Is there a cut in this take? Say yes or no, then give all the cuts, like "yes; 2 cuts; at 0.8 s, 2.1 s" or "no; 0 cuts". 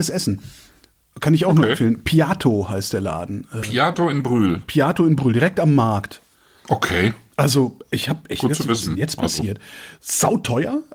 no; 0 cuts